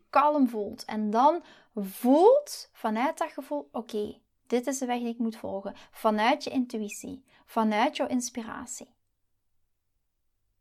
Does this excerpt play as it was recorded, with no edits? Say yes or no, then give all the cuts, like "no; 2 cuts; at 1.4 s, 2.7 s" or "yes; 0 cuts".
yes; 0 cuts